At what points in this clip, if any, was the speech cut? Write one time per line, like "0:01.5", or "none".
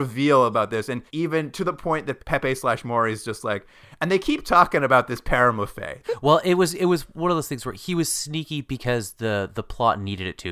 0:01.1
0:02.2
0:06.0